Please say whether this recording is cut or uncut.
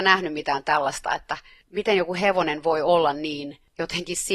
uncut